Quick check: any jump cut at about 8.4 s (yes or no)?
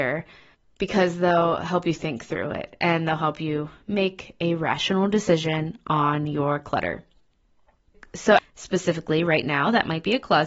yes